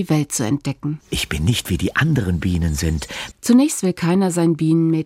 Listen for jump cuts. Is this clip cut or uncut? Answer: cut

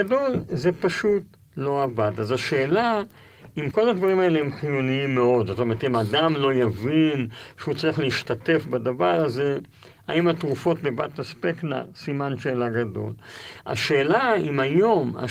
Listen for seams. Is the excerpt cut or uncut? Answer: cut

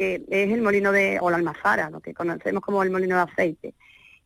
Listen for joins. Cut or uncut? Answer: uncut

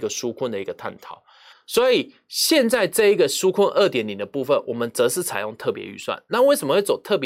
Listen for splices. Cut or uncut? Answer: cut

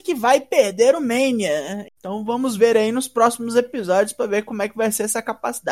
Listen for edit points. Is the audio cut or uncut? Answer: cut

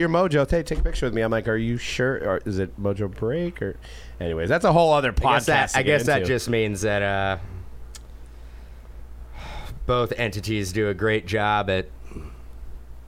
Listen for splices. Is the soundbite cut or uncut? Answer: uncut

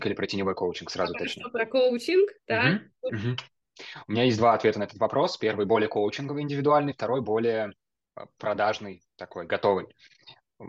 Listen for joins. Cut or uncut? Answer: cut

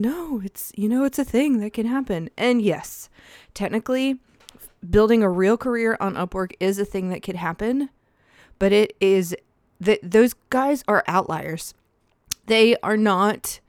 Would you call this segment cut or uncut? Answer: uncut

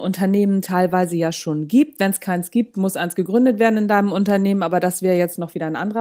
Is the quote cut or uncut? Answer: uncut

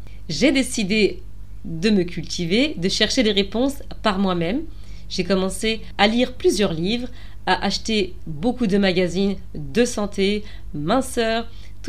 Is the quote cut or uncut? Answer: uncut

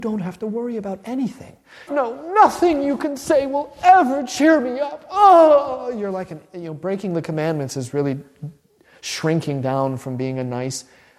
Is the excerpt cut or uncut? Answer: cut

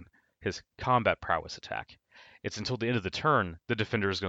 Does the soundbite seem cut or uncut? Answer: uncut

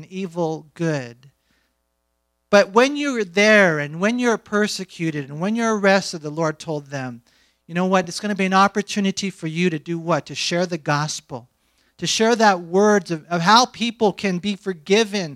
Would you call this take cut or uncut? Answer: uncut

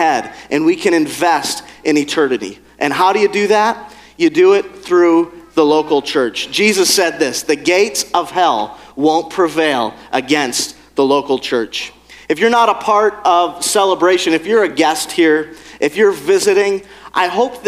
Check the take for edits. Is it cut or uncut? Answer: uncut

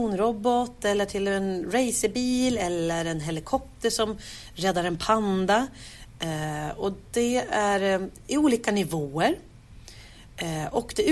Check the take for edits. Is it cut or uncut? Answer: uncut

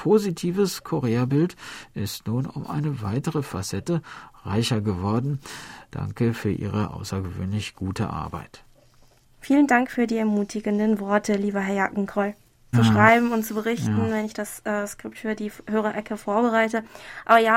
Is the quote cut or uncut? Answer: cut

